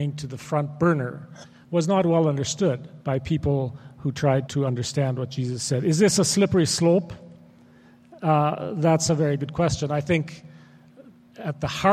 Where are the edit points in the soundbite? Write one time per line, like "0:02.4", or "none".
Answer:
0:01.6
0:03.0
0:04.5